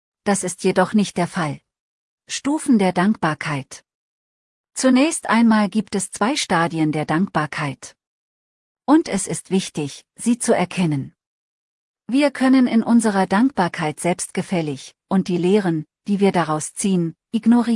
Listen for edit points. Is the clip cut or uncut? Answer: cut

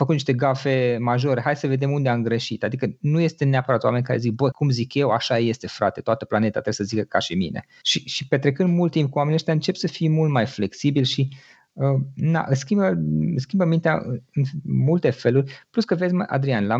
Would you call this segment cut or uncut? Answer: cut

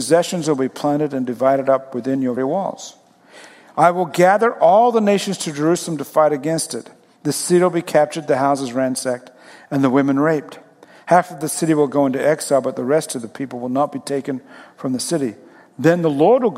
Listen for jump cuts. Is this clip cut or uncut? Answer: cut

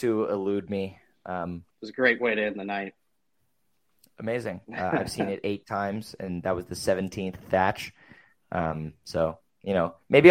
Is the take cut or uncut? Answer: cut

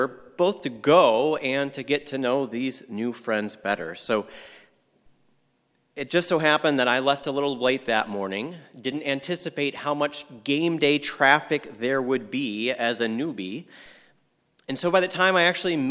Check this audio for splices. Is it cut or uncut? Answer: uncut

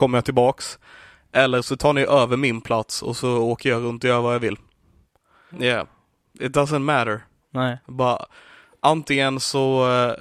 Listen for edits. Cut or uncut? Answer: cut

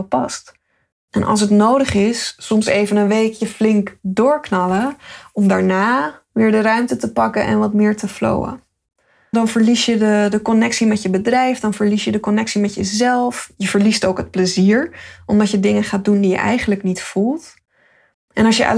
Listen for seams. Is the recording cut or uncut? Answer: cut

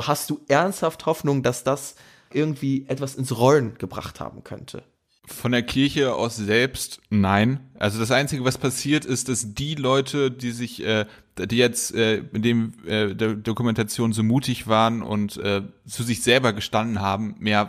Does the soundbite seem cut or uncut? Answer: uncut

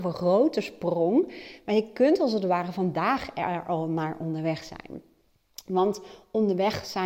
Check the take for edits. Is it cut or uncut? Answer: uncut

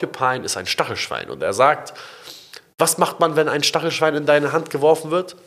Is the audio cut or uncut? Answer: uncut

